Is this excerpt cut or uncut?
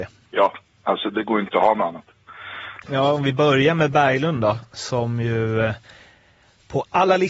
cut